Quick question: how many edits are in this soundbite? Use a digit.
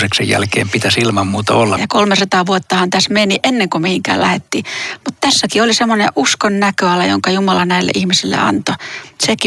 1